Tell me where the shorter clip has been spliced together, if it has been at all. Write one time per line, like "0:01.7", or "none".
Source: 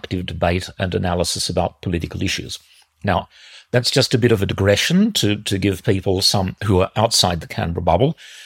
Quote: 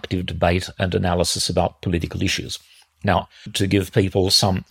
0:03.5